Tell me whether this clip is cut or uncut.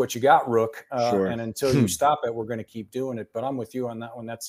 uncut